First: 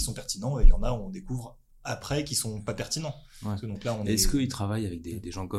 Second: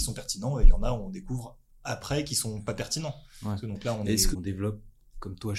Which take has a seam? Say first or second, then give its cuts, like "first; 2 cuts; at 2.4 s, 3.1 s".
second; 1 cut; at 4.3 s